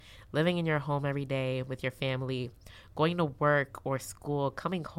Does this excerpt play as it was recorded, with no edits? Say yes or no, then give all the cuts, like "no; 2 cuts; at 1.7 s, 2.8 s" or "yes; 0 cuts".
yes; 0 cuts